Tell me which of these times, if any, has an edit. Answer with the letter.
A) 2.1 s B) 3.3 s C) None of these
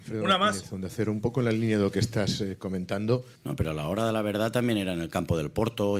B